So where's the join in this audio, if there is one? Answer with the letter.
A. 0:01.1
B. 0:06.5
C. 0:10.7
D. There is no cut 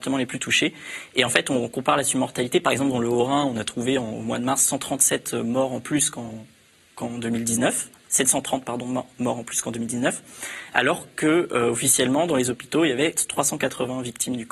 D